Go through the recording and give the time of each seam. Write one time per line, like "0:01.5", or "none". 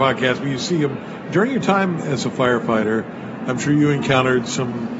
0:01.2